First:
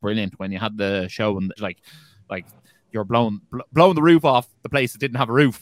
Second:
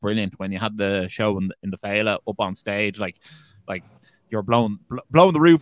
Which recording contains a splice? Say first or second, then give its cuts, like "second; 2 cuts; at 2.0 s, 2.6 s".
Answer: first; 1 cut; at 1.6 s